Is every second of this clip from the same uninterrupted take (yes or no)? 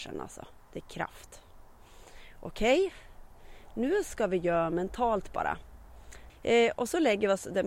no